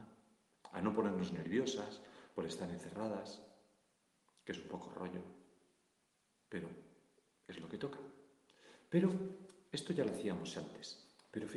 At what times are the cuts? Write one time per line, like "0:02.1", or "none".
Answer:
none